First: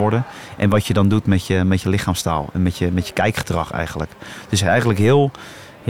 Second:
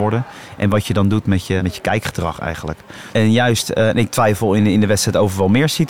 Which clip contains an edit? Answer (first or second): second